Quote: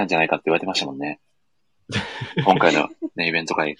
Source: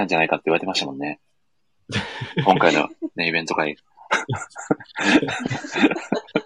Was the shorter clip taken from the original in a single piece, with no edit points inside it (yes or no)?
yes